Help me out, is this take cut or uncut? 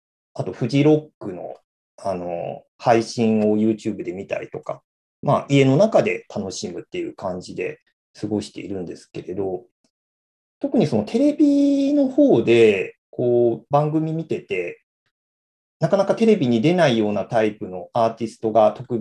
uncut